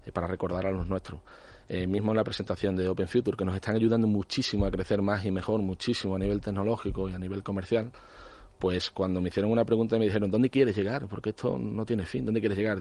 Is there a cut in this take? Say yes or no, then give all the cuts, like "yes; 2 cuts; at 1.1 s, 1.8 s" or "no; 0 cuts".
no; 0 cuts